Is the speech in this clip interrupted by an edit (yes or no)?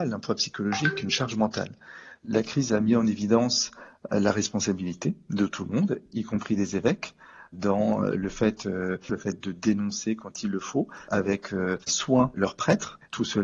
yes